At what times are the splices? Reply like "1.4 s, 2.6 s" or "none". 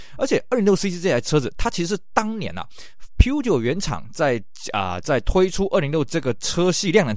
none